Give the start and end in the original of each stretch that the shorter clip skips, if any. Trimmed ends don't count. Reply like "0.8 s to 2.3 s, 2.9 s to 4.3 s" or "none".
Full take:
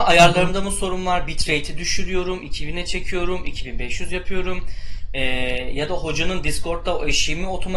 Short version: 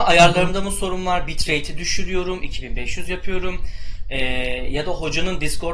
2.4 s to 3.4 s